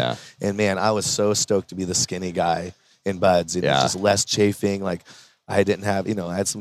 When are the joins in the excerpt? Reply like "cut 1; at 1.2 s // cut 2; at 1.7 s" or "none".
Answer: none